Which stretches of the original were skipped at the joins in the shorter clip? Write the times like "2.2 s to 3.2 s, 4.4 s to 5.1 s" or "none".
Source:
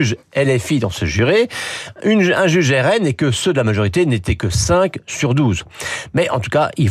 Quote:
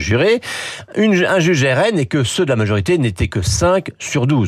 none